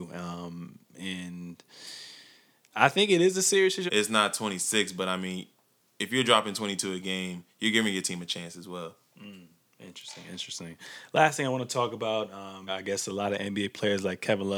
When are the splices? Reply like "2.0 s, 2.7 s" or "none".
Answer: 3.9 s, 12.7 s